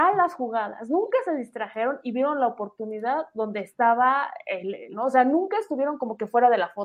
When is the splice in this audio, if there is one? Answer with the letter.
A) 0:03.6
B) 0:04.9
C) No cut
B